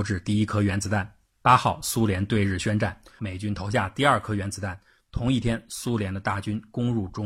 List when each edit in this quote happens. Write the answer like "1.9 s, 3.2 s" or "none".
3.2 s